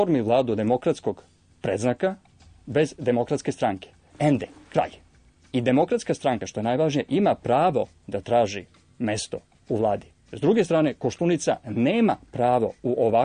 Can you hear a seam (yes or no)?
no